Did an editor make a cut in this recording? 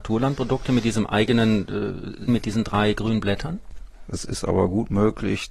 yes; 2 cuts; at 2.3 s, 4.0 s

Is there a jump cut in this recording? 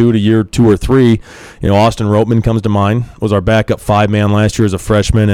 no; 0 cuts

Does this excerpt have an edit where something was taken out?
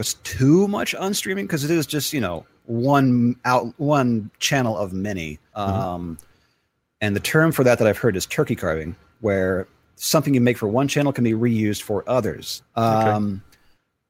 yes; 1 cut; at 5.5 s

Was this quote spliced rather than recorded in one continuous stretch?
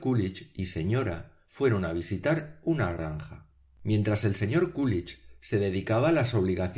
no; 0 cuts

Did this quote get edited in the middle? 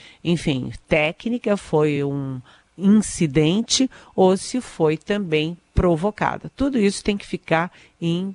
no; 0 cuts

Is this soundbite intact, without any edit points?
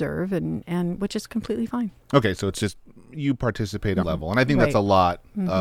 no; 1 cut; at 4.0 s

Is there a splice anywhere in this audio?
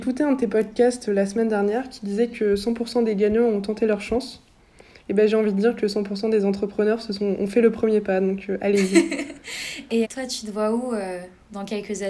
yes; 1 cut; at 10.0 s

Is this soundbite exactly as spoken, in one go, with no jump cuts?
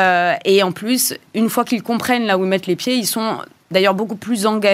yes; 0 cuts

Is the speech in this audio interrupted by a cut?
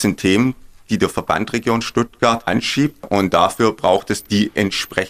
no; 0 cuts

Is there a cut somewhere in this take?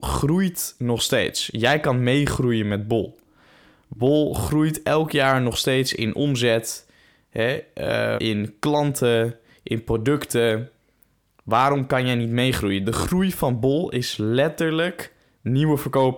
yes; 1 cut; at 8.2 s

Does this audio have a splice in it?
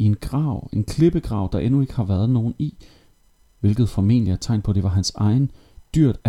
no; 0 cuts

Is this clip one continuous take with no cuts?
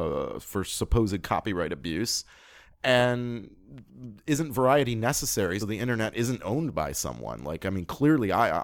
no; 1 cut; at 5.6 s

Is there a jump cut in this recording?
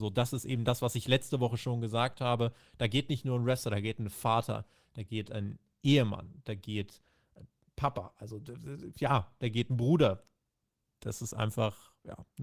no; 0 cuts

